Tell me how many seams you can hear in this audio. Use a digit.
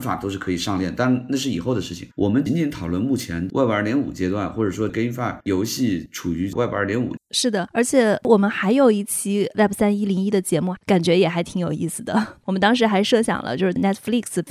3